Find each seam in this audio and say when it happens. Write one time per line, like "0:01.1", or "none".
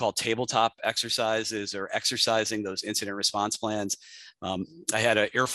none

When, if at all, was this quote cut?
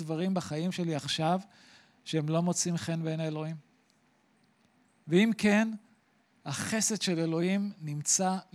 none

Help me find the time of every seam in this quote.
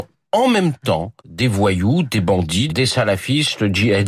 0:01.2
0:02.7

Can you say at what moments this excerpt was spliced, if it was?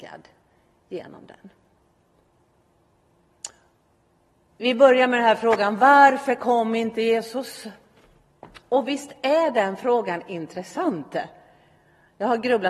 0:04.5

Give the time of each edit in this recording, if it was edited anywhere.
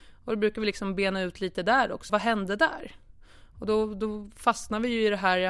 0:02.1

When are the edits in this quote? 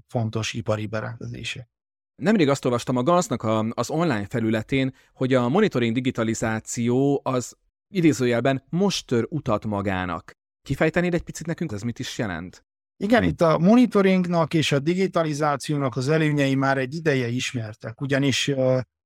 0:11.7

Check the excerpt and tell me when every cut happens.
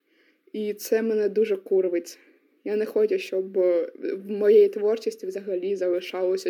none

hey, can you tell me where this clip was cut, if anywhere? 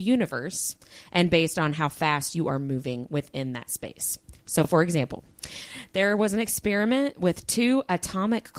none

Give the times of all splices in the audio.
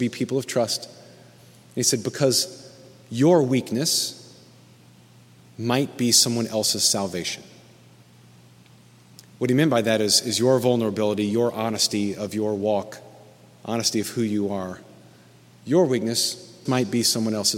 0:16.7

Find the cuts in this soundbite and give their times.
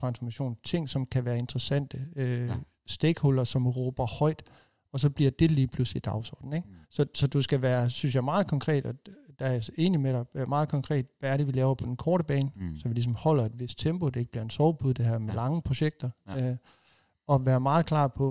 0:06.8

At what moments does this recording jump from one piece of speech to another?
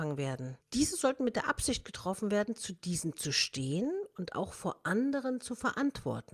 none

